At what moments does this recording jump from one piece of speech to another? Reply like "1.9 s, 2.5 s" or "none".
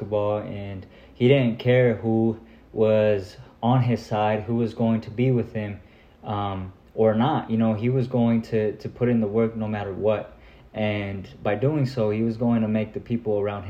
none